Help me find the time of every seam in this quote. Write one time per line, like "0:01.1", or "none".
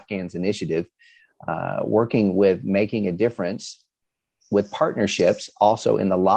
none